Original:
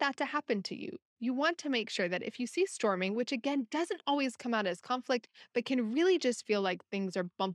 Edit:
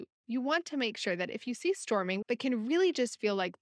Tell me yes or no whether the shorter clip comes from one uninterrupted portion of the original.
no